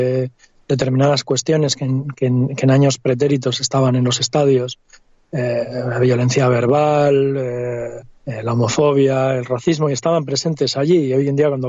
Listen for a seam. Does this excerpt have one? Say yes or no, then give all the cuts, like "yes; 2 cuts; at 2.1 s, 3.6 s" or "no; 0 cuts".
yes; 1 cut; at 8.1 s